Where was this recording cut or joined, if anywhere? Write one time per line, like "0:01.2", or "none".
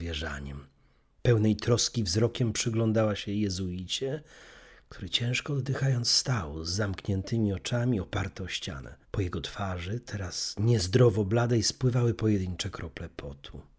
0:09.0